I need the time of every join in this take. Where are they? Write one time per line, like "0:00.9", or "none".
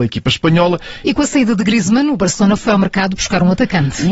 0:01.0